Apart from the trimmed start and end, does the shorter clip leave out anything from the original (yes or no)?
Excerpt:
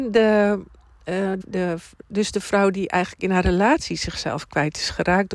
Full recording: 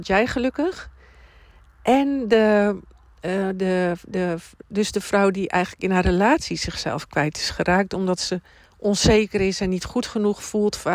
yes